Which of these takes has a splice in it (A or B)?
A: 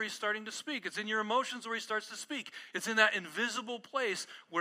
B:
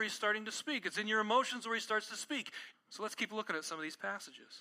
B